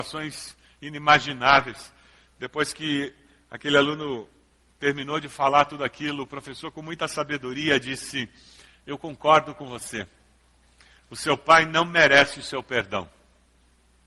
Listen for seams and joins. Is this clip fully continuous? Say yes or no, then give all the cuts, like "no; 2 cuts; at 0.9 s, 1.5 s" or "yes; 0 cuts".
yes; 0 cuts